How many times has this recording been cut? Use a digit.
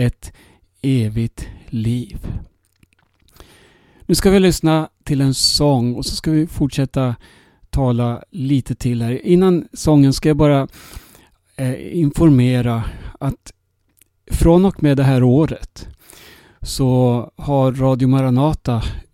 0